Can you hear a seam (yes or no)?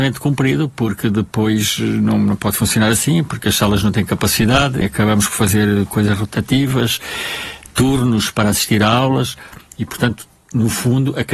yes